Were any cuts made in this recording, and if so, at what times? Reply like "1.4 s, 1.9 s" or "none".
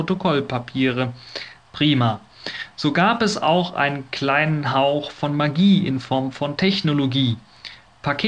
1.6 s